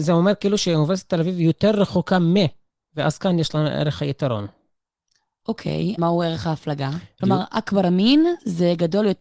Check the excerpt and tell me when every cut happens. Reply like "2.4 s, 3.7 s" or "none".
6.0 s, 7.2 s